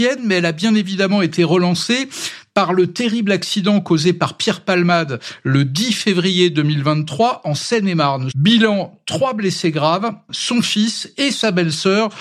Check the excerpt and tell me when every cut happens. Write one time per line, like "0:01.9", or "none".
0:08.3
0:10.3